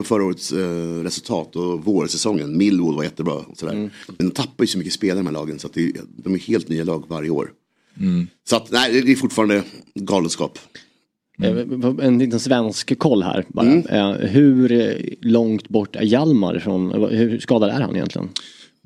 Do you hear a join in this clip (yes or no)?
no